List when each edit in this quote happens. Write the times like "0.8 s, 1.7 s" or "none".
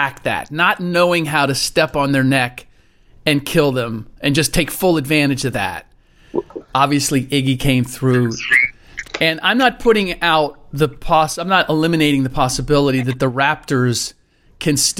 6.7 s, 9.0 s